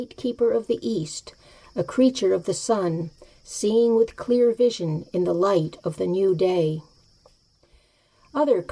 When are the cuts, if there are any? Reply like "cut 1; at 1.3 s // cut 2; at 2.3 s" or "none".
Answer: none